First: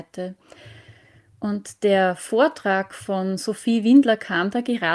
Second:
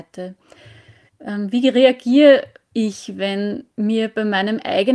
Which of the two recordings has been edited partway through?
second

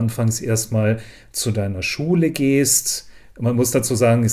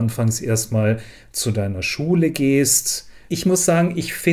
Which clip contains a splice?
second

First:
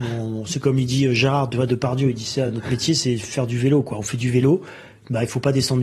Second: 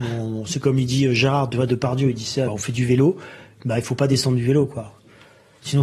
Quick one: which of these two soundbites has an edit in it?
second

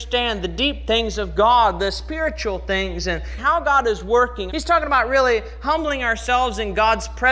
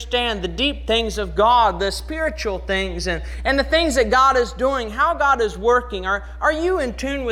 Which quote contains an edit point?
first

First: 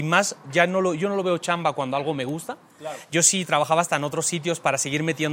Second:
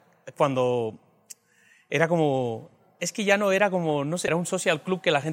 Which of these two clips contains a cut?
second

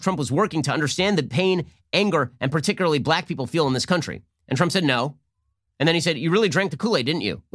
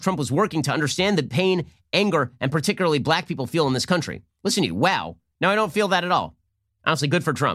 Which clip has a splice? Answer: second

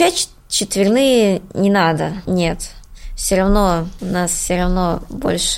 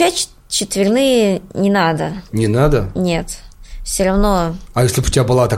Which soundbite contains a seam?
first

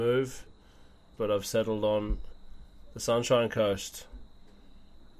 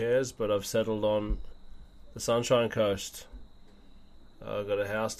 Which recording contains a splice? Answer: first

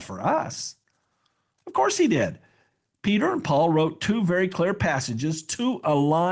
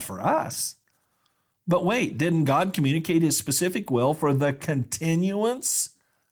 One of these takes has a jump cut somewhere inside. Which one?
first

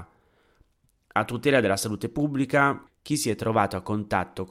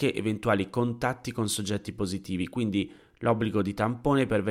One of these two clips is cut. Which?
first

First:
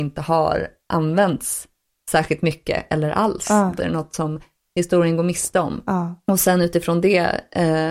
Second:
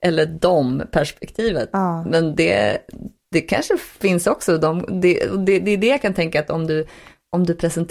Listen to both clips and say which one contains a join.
first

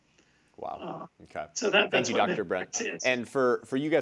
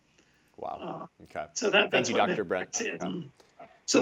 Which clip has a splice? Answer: second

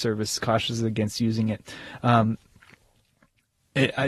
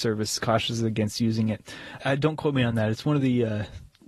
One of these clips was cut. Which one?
second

